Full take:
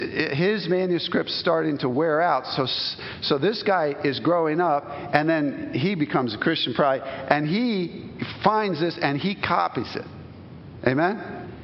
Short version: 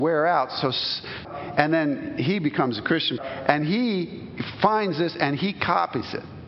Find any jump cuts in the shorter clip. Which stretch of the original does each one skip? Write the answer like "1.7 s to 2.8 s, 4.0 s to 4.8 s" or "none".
3.2 s to 4.8 s, 6.7 s to 7.0 s